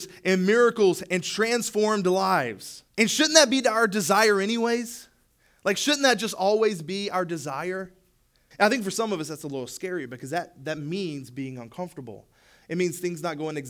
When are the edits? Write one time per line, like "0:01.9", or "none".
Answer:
0:02.9
0:08.5

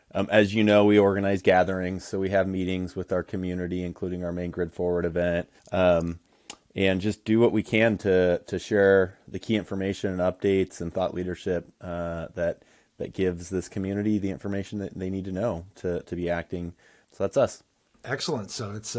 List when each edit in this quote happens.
0:05.6
0:17.0

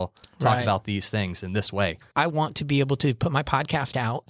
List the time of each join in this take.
0:02.1

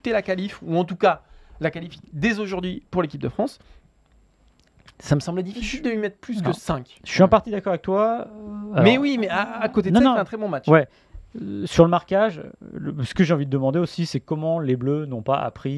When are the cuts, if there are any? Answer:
none

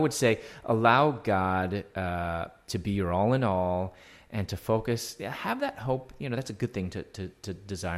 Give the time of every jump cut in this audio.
none

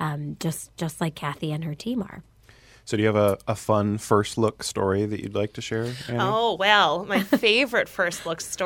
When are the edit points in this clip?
none

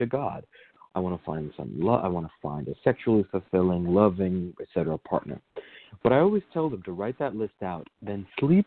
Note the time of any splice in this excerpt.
none

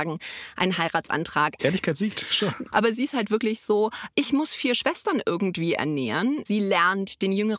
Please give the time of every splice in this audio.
0:01.6
0:02.7
0:06.4

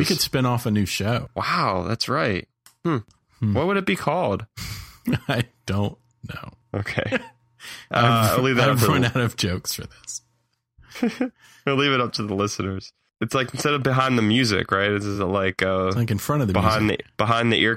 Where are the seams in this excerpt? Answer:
none

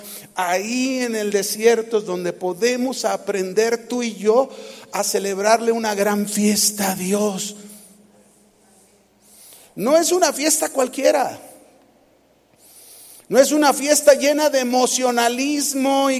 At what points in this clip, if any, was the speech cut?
none

